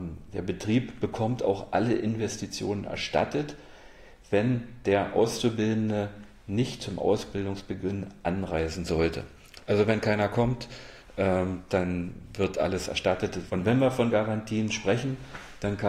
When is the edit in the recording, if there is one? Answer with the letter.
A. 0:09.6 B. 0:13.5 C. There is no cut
B